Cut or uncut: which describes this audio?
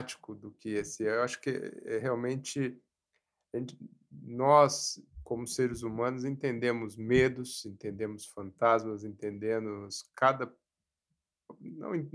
uncut